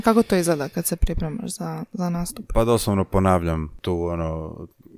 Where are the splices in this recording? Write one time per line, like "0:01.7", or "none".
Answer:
none